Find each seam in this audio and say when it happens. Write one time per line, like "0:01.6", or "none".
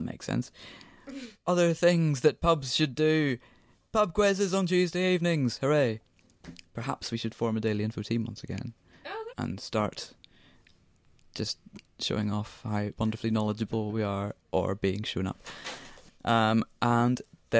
0:09.3